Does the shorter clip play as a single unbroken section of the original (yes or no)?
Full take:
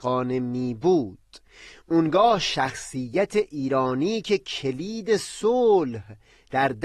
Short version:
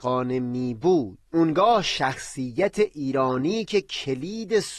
no